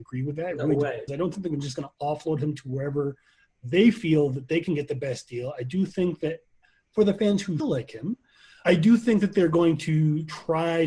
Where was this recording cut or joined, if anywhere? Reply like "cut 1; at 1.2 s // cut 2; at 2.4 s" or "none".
cut 1; at 1.1 s // cut 2; at 7.6 s